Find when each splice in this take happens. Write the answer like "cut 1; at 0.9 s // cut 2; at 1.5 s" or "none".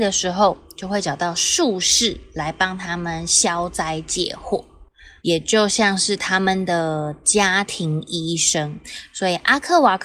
cut 1; at 5.2 s